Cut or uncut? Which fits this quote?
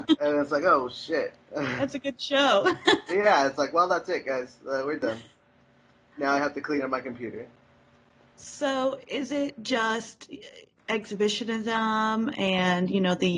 uncut